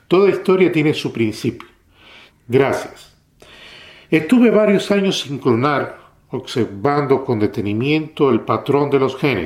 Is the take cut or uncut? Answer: cut